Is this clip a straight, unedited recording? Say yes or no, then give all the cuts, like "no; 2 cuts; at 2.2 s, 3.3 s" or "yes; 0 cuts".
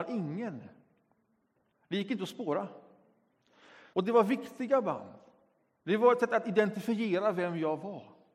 no; 1 cut; at 3.9 s